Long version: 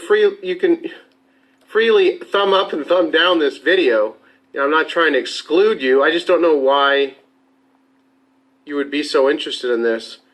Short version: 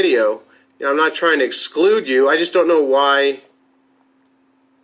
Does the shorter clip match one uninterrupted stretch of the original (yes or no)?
yes